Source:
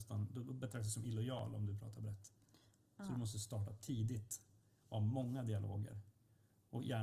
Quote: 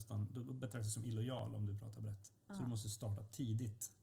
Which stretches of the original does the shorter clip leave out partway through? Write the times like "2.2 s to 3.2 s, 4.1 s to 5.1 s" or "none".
2.4 s to 2.9 s